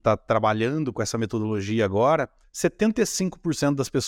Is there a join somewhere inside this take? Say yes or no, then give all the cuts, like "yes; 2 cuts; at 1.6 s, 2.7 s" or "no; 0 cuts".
yes; 1 cut; at 2.4 s